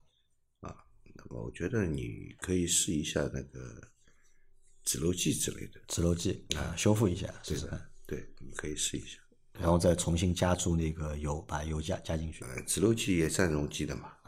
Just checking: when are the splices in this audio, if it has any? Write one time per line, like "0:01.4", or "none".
none